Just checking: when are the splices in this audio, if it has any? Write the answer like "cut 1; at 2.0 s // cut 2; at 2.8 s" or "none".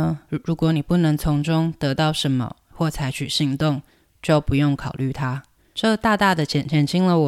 none